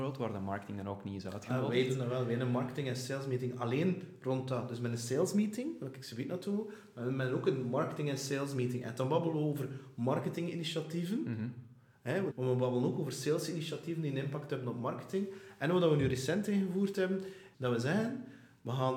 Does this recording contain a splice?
yes; 2 cuts; at 12.3 s, 17.5 s

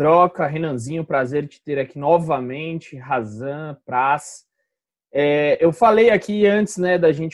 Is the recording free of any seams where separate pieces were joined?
yes; 0 cuts

